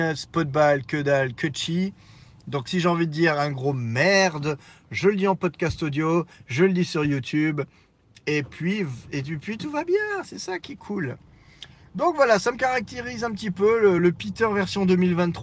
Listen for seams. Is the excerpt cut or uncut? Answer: uncut